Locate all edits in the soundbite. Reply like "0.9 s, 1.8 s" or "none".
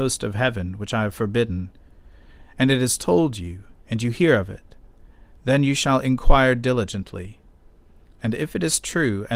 none